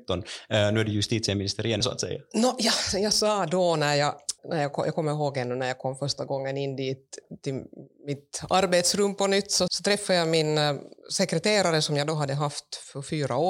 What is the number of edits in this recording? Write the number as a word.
three